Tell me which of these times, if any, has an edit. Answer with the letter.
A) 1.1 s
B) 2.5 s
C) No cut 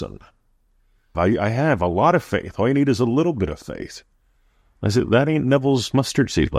A